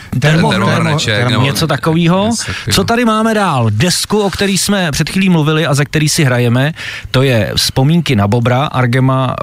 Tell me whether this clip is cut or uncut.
uncut